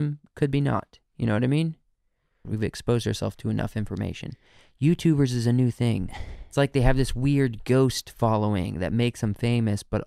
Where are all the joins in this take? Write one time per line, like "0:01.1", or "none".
0:02.4